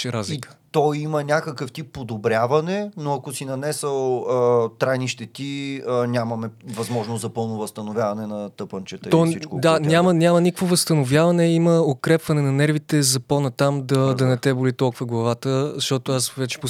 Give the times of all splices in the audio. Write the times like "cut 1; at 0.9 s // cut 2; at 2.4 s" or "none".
none